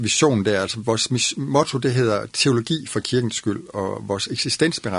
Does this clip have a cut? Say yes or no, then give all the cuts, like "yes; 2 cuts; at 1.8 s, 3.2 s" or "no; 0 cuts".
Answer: no; 0 cuts